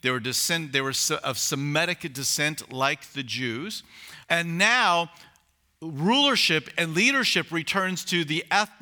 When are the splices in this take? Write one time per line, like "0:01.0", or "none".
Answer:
0:04.2